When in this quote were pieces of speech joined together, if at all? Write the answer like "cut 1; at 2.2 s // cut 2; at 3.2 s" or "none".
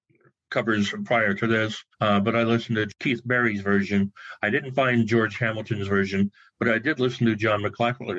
cut 1; at 1.9 s